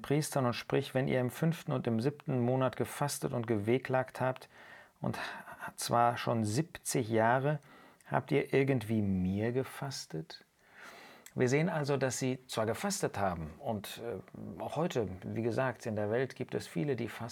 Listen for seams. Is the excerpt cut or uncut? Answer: uncut